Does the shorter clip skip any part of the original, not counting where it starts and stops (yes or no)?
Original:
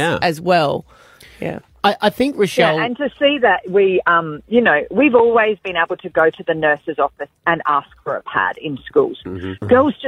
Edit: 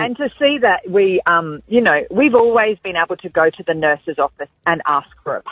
no